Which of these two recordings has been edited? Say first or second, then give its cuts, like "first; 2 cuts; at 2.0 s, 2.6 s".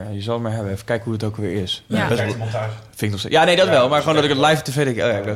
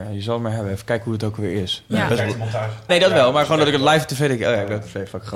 second; 1 cut; at 2.9 s